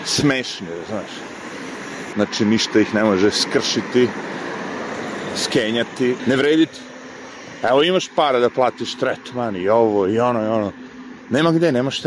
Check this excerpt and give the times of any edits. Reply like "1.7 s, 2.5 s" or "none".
2.1 s, 6.2 s